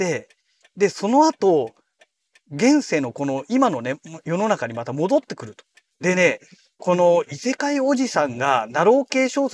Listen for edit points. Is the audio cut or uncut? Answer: cut